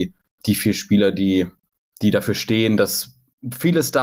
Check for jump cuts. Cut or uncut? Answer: uncut